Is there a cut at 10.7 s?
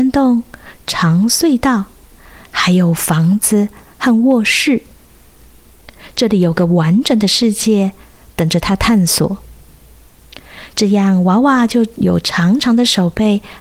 yes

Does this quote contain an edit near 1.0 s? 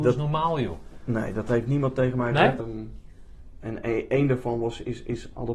no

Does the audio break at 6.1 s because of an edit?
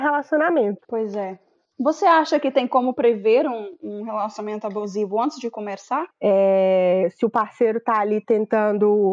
yes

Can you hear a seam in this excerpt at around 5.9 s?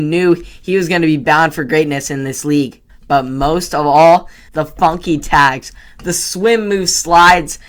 no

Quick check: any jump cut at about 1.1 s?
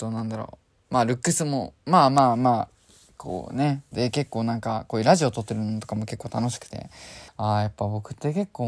no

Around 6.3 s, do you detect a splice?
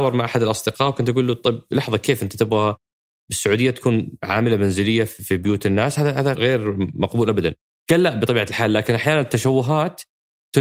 yes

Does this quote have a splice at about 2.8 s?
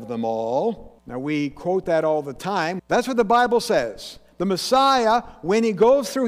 yes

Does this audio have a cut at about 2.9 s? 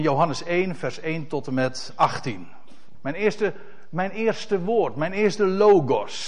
yes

